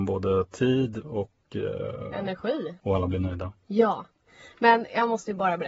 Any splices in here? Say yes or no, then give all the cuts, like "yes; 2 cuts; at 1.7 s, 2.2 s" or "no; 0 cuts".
no; 0 cuts